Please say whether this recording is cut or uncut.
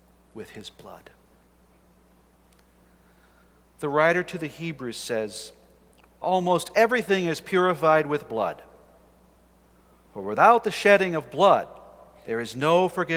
cut